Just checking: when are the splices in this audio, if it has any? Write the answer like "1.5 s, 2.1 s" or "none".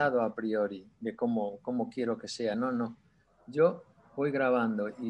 none